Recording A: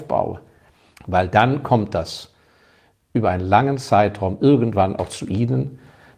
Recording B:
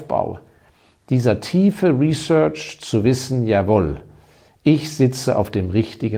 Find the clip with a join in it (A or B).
A